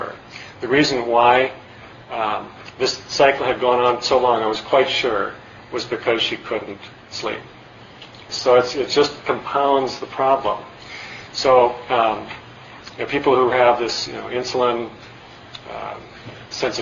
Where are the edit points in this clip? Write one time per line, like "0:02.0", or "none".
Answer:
0:08.3